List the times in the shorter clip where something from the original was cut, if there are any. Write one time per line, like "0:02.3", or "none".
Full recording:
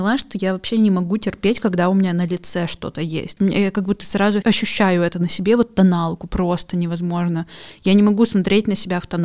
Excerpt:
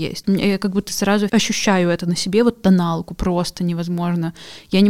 none